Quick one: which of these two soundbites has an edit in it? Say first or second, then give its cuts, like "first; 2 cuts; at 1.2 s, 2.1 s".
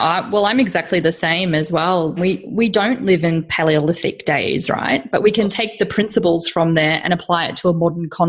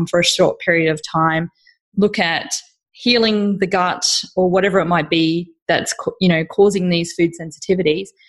first; 1 cut; at 2.2 s